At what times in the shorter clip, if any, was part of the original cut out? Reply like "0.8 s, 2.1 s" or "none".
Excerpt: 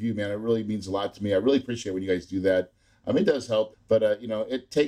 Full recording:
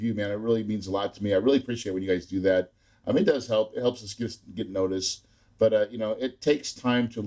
3.7 s